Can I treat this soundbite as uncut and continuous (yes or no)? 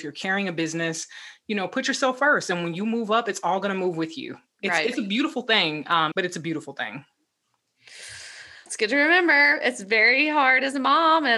no